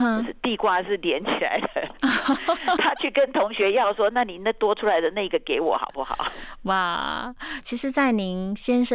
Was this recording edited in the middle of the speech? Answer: yes; 1 cut; at 7.6 s

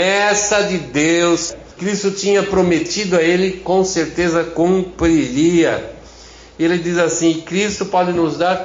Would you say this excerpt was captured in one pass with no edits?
yes; 0 cuts

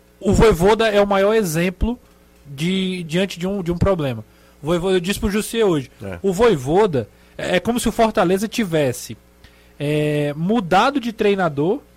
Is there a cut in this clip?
yes; 1 cut; at 3.1 s

